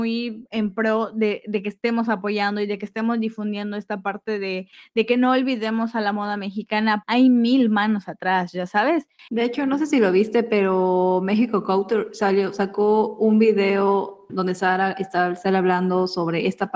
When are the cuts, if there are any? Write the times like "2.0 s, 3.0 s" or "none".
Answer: 7.0 s, 9.3 s